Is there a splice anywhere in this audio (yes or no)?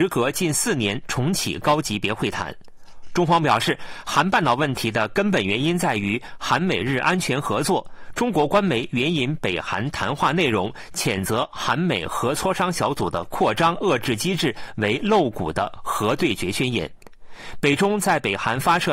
no